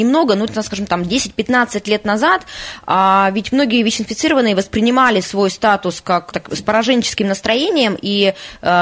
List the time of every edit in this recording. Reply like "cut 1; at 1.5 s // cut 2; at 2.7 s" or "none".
cut 1; at 6.3 s